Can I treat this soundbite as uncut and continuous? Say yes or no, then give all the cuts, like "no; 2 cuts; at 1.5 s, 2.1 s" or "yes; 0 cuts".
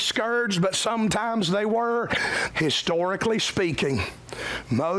no; 1 cut; at 2.5 s